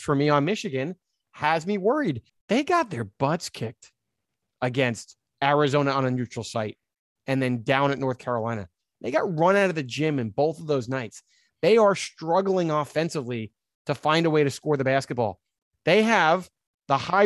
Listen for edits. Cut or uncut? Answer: cut